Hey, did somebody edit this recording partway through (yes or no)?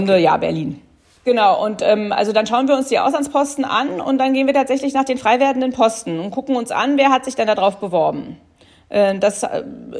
no